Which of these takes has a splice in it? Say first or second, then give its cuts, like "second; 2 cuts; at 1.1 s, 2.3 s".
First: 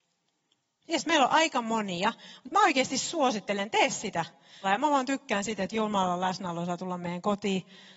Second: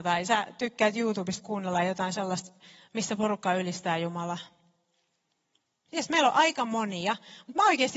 first; 1 cut; at 4.6 s